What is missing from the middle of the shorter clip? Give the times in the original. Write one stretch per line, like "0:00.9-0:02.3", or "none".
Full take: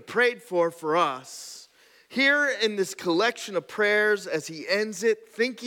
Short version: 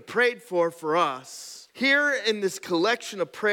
0:01.7-0:02.0